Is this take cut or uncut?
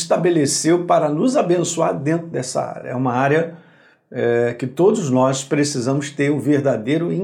uncut